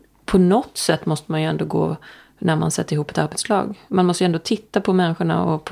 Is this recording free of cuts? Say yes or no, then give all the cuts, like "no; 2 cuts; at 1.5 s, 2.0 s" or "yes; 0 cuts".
yes; 0 cuts